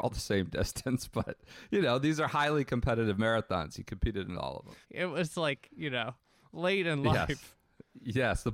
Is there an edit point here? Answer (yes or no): yes